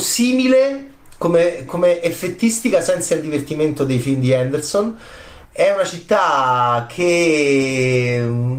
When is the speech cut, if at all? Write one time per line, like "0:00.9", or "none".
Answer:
0:01.7
0:05.4